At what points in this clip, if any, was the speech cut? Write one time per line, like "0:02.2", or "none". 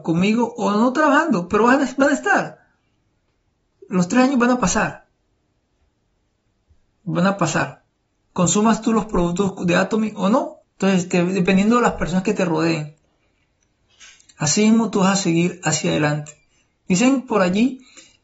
0:10.6